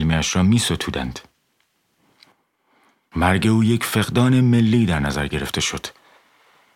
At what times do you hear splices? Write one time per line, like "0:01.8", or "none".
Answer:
0:03.1